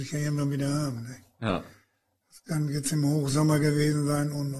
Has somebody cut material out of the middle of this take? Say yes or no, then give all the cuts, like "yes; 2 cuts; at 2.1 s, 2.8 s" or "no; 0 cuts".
no; 0 cuts